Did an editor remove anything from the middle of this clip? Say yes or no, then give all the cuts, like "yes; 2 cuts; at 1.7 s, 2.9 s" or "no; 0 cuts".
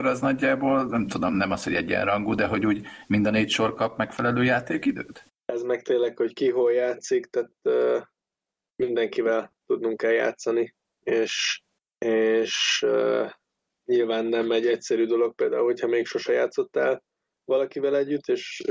yes; 1 cut; at 5.3 s